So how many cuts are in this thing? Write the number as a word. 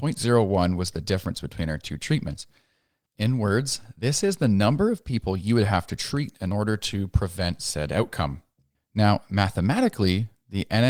two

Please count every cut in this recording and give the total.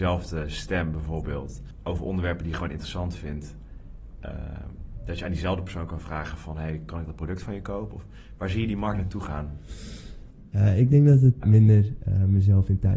two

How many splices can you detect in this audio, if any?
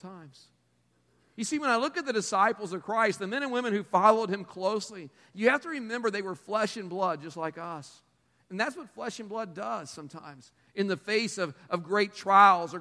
zero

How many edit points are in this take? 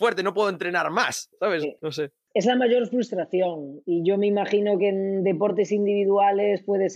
one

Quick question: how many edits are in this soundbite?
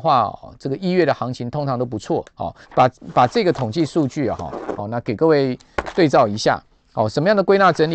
two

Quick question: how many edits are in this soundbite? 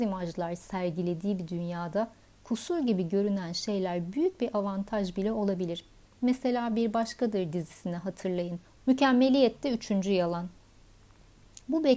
one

